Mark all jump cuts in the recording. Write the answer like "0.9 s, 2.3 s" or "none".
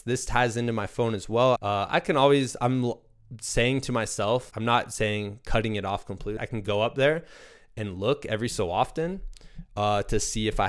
1.6 s, 4.5 s, 6.4 s